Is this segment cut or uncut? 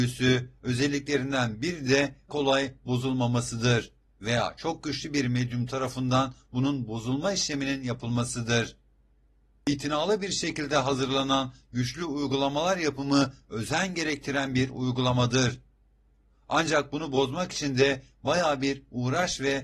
cut